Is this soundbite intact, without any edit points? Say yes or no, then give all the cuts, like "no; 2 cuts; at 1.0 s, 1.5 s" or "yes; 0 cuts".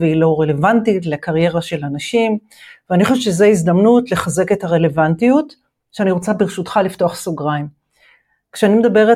yes; 0 cuts